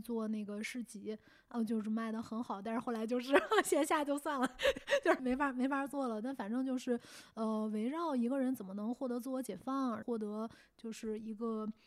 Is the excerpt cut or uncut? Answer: cut